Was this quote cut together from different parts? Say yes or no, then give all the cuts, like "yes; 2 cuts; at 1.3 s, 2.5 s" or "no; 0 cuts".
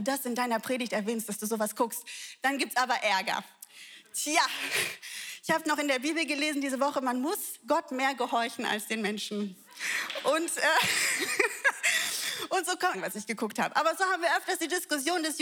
yes; 1 cut; at 12.9 s